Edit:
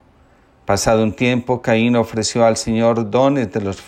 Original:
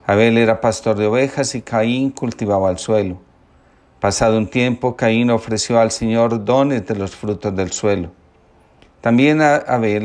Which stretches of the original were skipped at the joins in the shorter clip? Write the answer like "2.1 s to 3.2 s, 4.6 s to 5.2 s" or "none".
none